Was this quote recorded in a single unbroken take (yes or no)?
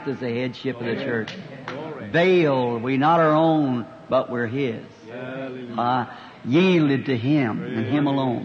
yes